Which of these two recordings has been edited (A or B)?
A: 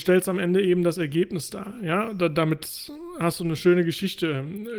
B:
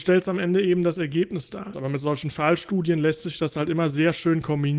B